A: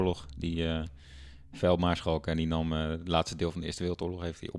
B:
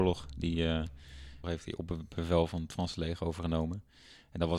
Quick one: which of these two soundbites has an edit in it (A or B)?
B